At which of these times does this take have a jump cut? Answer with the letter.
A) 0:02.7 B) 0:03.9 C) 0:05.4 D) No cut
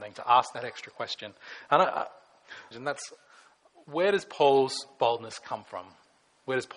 A